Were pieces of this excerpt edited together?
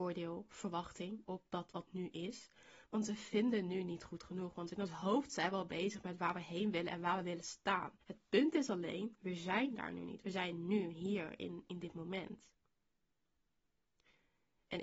yes; 2 cuts; at 1.8 s, 8.0 s

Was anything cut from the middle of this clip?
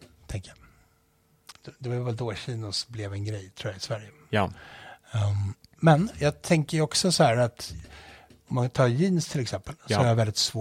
yes; 1 cut; at 1.5 s

